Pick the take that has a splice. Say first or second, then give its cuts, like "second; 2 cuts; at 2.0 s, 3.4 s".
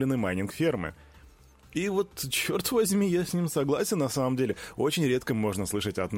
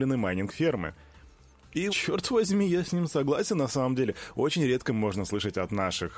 second; 1 cut; at 1.9 s